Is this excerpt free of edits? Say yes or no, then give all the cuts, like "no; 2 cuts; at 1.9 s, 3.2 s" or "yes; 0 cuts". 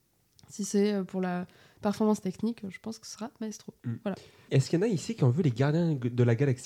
no; 1 cut; at 4.5 s